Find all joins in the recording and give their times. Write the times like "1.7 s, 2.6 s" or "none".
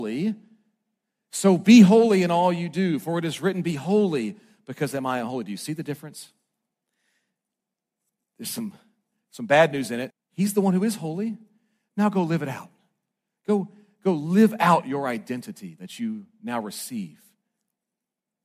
10.1 s